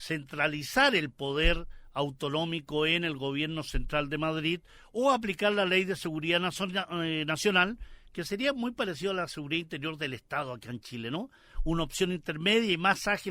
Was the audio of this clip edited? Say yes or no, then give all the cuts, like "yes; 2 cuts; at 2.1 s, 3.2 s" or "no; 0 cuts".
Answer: no; 0 cuts